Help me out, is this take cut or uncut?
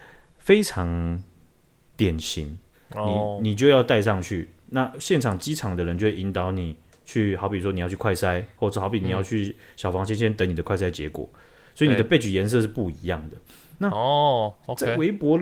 cut